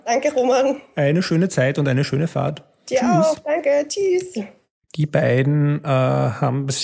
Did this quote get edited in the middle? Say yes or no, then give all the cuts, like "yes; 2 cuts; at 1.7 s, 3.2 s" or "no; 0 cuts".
yes; 1 cut; at 4.8 s